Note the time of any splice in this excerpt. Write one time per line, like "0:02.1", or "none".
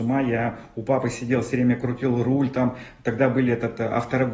none